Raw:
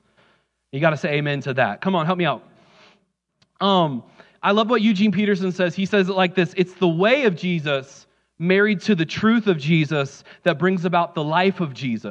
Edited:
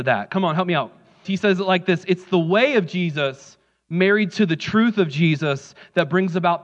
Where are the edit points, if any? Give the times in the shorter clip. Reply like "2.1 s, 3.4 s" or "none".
1.2 s